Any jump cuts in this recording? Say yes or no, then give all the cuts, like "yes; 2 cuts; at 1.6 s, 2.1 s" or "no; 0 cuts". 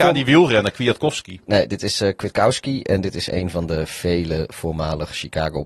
no; 0 cuts